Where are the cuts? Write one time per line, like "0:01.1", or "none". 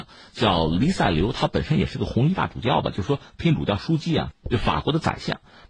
0:04.3

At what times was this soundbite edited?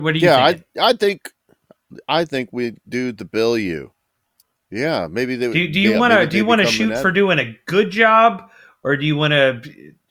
0:04.6

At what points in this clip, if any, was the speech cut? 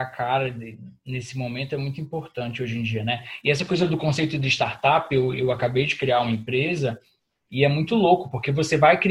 none

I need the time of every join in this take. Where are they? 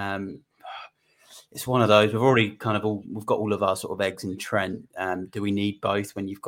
none

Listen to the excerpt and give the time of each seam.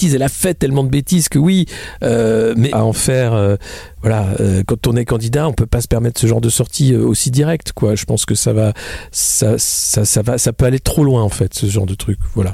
0:02.7

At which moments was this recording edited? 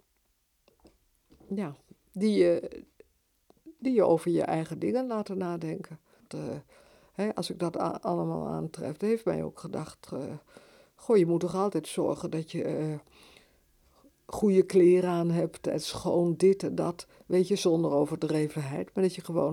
0:06.3

